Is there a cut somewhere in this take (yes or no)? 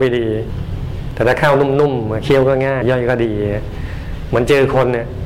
yes